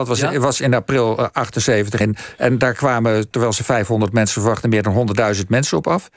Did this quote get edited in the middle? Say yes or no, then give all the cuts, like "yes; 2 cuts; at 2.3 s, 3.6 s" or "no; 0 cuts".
no; 0 cuts